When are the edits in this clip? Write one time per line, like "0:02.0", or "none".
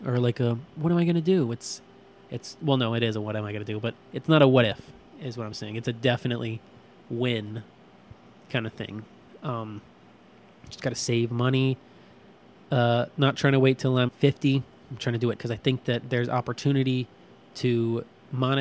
0:14.1
0:15.3